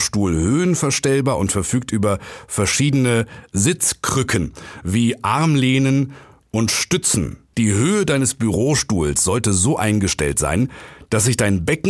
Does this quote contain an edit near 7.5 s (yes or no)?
yes